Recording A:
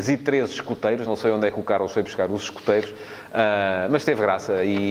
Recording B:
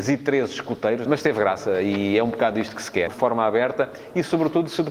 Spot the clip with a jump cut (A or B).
B